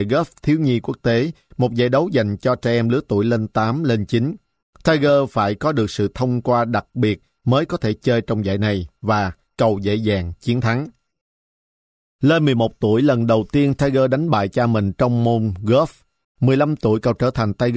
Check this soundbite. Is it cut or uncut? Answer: cut